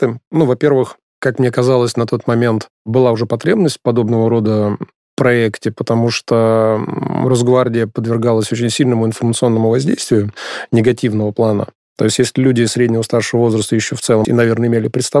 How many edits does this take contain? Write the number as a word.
two